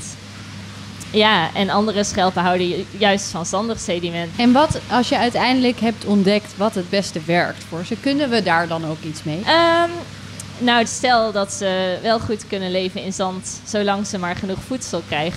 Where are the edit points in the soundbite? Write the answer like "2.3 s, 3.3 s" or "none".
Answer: 4.3 s, 9.4 s, 10.8 s